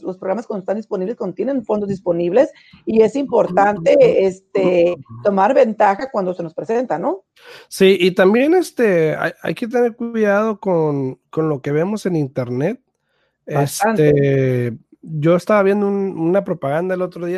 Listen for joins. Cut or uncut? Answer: uncut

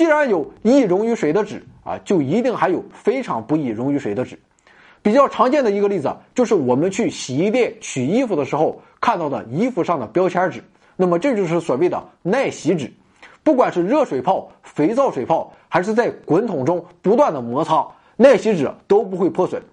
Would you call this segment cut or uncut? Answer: uncut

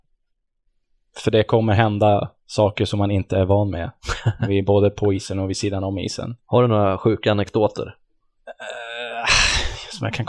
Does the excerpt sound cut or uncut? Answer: uncut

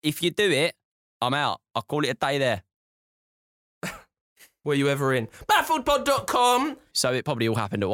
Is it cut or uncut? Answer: cut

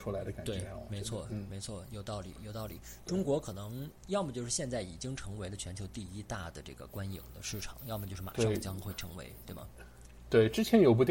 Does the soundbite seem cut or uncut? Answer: uncut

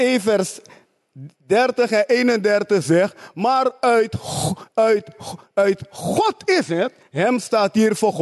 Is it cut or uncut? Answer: uncut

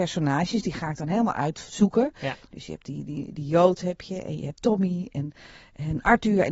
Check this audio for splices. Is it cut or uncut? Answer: uncut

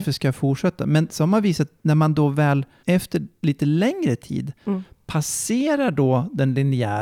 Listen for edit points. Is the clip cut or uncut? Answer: cut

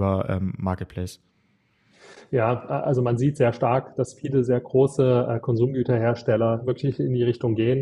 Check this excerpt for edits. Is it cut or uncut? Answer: uncut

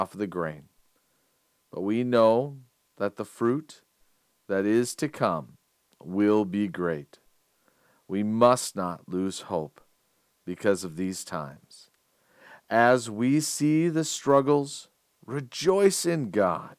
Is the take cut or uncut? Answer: uncut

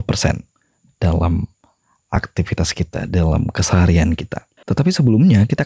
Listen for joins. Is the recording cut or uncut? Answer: cut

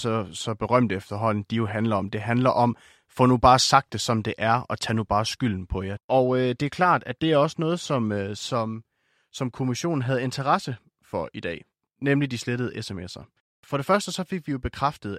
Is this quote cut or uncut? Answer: cut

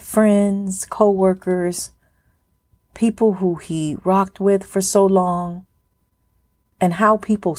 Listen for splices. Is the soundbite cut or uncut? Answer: uncut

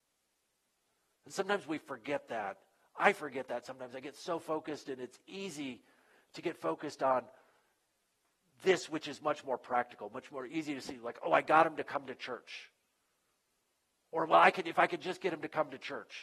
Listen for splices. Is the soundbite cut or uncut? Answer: uncut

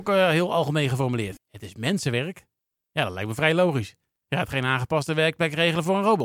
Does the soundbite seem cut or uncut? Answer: cut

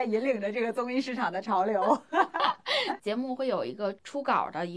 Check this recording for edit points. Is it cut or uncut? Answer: cut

